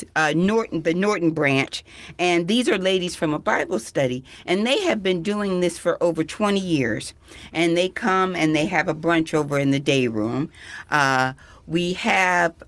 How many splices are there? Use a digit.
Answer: 0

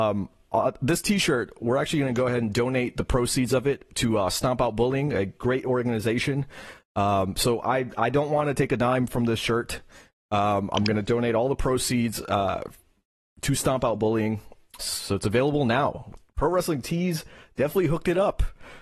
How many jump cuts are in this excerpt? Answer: 1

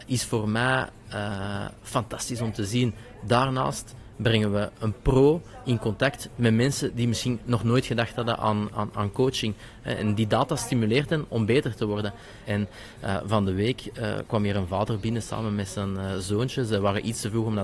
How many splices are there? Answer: 1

